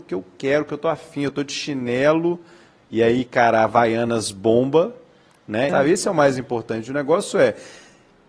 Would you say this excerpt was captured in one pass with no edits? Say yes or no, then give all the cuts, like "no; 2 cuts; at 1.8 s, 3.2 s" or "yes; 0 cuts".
no; 1 cut; at 5.7 s